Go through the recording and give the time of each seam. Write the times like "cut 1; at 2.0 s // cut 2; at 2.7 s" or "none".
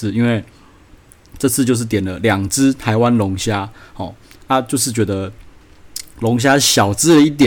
none

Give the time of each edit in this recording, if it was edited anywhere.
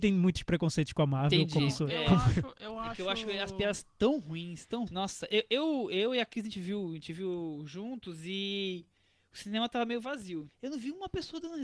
cut 1; at 4.9 s // cut 2; at 10.5 s

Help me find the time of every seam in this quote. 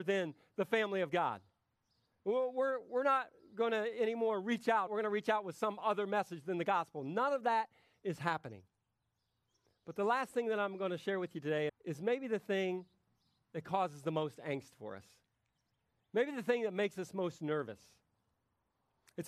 cut 1; at 4.9 s // cut 2; at 11.7 s

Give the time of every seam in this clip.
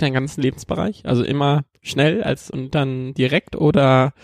cut 1; at 2.5 s

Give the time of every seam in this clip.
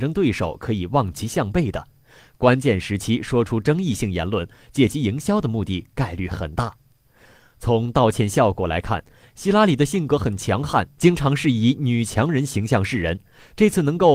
none

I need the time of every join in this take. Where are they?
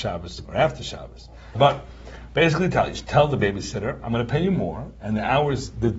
cut 1; at 1.5 s

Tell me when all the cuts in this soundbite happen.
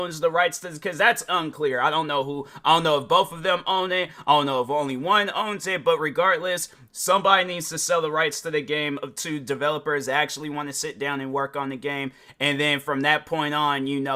none

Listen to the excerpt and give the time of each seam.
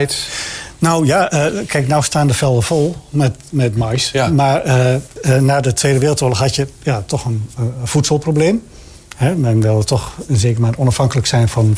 cut 1; at 5.2 s

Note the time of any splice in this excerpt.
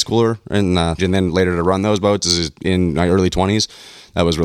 cut 1; at 1.0 s

